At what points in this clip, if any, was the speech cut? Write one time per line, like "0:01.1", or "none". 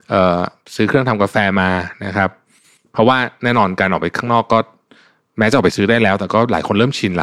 none